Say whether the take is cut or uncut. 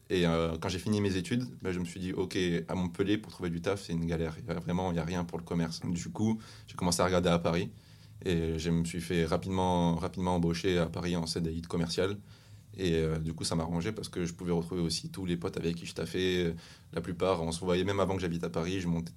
cut